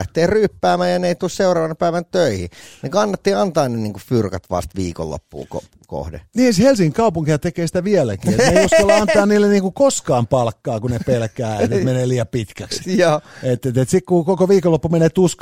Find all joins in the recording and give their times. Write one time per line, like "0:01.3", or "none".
none

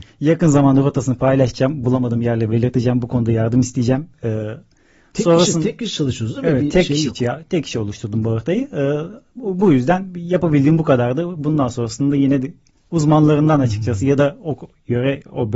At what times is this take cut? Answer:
none

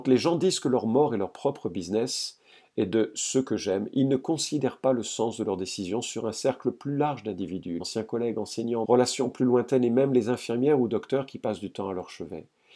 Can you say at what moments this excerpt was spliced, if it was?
0:07.8
0:08.8

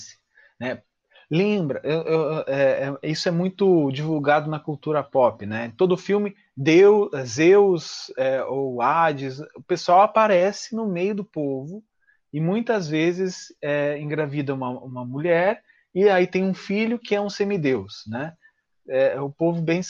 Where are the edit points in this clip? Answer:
none

